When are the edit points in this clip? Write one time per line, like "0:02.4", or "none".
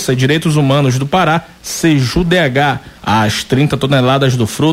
0:03.0

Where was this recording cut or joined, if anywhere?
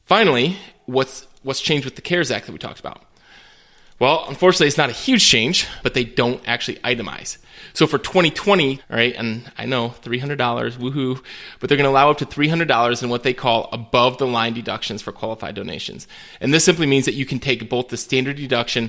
0:05.8
0:08.8

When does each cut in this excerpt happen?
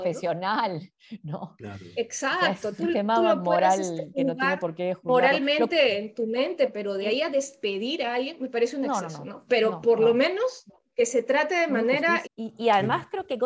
0:12.3

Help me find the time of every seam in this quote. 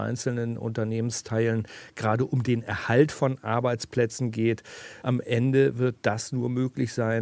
0:05.0

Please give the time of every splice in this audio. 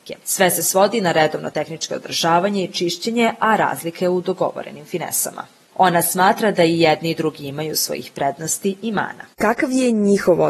0:05.7
0:09.3

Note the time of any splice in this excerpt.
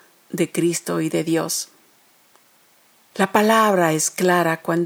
0:03.1

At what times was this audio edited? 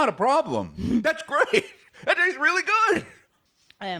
none

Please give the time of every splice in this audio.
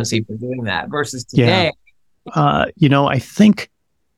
0:02.2

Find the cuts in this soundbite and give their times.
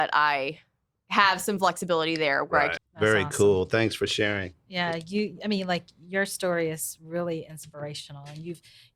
0:02.8

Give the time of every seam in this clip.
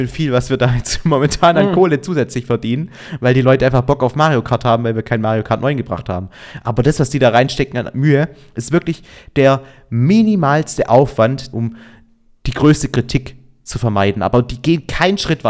0:11.5

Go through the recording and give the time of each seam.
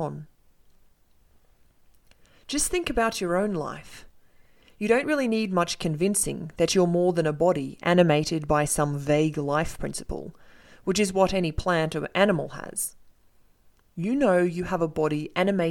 none

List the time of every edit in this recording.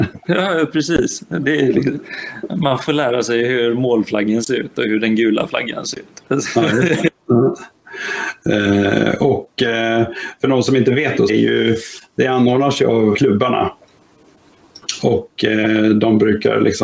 0:11.3
0:13.1

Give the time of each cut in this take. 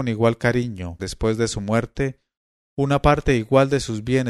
0:01.0

